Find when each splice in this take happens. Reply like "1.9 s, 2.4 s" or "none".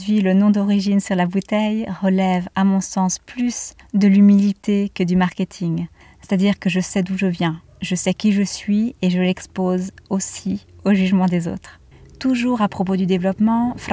none